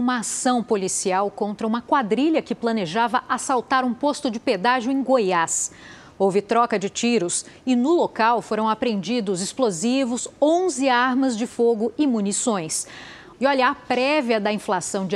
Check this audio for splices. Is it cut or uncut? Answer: cut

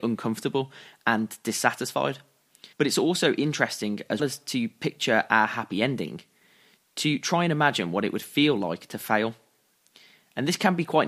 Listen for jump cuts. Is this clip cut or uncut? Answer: cut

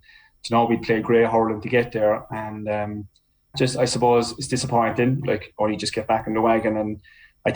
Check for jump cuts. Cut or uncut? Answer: cut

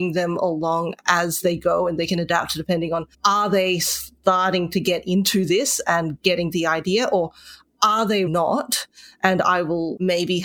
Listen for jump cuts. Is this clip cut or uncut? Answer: cut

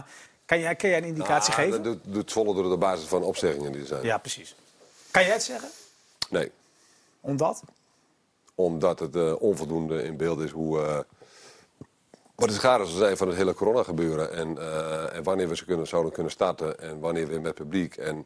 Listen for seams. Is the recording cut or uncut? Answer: uncut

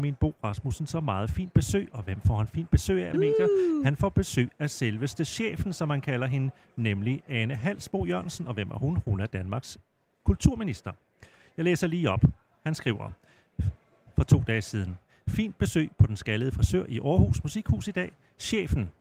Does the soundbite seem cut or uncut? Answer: cut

